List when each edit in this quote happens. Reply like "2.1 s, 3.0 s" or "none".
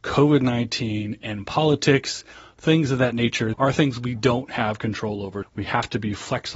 3.5 s, 5.4 s